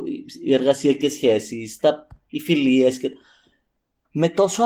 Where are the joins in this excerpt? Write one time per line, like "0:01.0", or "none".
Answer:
none